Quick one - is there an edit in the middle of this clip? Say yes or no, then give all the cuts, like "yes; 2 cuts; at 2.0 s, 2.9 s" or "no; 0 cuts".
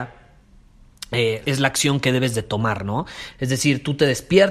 yes; 2 cuts; at 1.4 s, 3.3 s